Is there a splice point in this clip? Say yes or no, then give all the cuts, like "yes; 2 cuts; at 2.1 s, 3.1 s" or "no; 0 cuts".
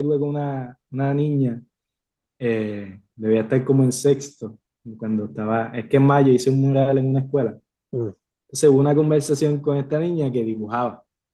yes; 1 cut; at 8.4 s